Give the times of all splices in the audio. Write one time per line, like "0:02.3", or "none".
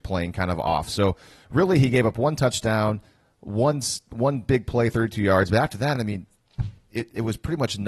none